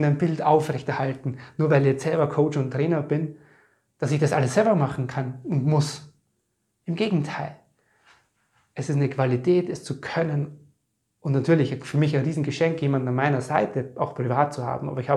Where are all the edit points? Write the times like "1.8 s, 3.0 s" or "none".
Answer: none